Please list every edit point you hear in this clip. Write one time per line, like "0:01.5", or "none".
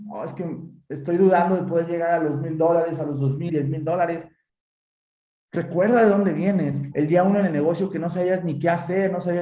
0:03.5
0:06.9